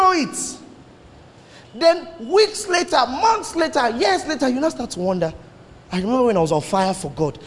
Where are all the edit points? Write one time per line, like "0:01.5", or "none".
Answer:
none